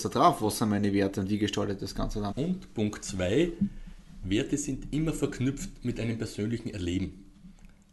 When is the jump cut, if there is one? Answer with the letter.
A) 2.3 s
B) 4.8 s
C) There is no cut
A